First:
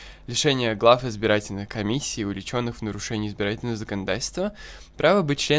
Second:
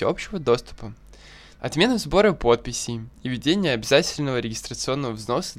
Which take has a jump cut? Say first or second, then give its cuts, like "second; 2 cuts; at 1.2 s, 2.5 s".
second; 1 cut; at 1.6 s